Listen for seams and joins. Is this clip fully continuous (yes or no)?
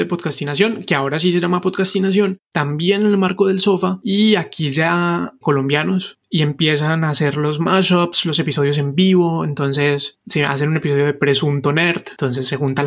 no